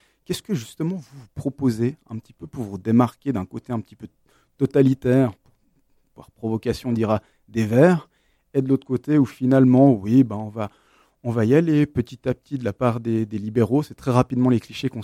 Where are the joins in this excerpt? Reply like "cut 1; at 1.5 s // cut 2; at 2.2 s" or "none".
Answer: none